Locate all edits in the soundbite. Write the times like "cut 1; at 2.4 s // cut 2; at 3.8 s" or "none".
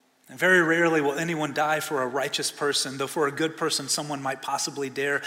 none